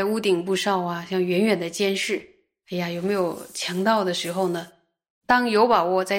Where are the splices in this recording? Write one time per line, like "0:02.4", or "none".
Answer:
0:05.1